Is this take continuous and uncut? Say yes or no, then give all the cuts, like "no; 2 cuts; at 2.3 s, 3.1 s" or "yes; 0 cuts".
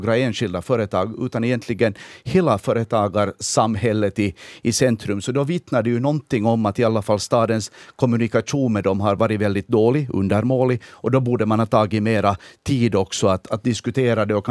yes; 0 cuts